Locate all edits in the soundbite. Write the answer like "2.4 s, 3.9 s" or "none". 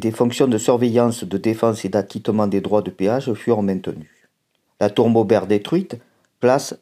4.7 s